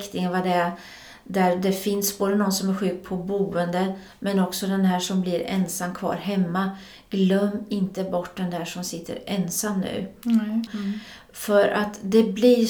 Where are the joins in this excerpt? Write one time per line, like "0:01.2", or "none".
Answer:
0:10.7